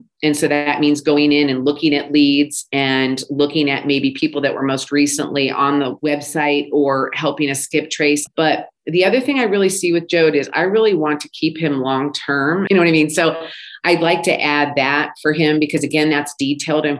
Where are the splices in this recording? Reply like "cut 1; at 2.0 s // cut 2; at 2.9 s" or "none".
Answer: cut 1; at 8.3 s // cut 2; at 12.7 s